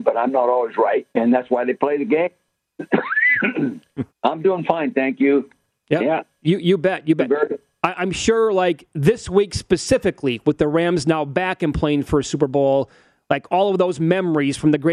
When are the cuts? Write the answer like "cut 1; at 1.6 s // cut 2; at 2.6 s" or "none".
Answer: cut 1; at 1.1 s // cut 2; at 4.1 s